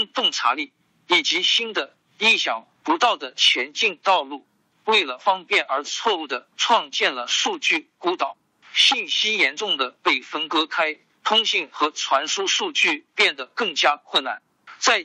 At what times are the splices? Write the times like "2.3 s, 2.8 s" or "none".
4.7 s